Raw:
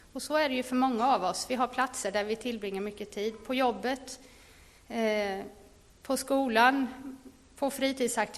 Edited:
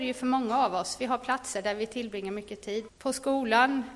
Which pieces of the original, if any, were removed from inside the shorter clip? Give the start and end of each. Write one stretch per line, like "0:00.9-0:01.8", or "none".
0:03.4-0:05.9